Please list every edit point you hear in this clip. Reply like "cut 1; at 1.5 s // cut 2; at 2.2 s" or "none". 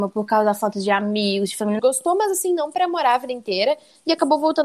cut 1; at 1.8 s